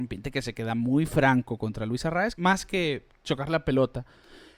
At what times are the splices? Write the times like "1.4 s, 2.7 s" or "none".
2.3 s